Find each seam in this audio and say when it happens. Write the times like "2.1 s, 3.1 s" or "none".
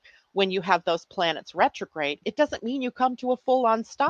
none